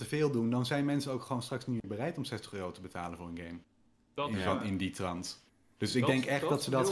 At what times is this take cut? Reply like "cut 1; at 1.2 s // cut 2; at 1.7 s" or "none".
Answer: none